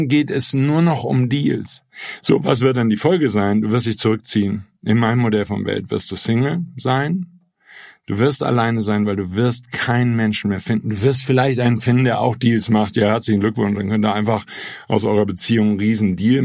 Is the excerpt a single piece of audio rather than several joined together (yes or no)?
yes